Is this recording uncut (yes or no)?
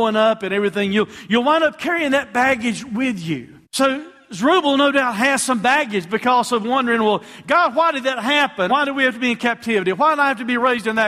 no